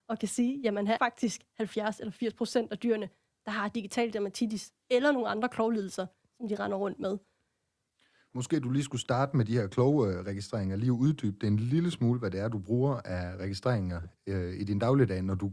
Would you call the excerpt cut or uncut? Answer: cut